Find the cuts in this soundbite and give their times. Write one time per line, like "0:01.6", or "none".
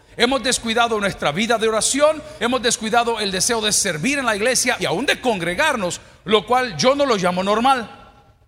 0:02.4
0:04.8